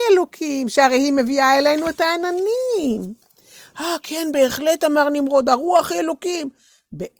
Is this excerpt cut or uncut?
uncut